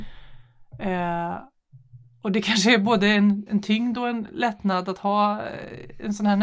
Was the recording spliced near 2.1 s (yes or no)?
no